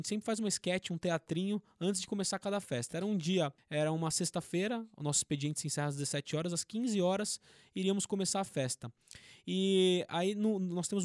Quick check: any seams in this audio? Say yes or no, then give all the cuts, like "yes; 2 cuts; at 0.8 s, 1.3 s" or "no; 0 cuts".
no; 0 cuts